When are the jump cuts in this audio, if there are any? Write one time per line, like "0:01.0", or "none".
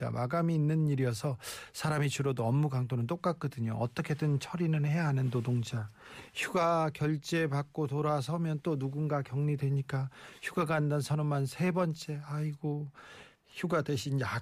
none